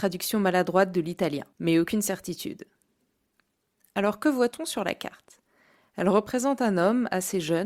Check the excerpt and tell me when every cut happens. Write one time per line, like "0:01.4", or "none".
none